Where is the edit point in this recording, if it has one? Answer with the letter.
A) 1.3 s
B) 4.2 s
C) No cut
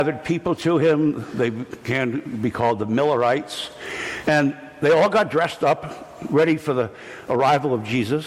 B